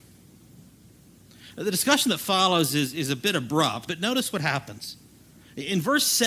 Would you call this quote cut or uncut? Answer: cut